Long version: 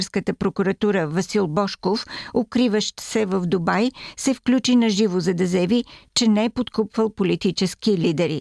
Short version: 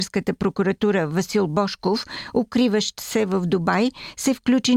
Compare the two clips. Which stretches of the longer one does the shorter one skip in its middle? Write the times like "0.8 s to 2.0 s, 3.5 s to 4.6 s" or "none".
none